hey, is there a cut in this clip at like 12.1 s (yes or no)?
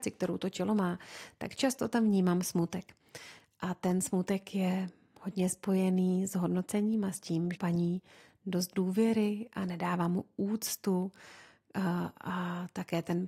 no